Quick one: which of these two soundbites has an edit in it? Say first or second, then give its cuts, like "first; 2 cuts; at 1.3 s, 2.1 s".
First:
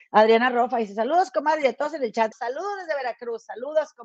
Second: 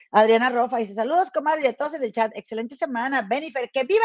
first; 1 cut; at 2.3 s